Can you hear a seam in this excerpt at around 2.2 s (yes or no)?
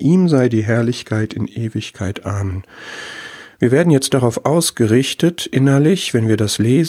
no